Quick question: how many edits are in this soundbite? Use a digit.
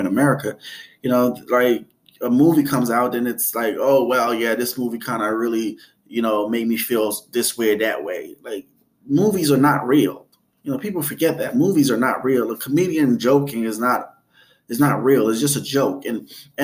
0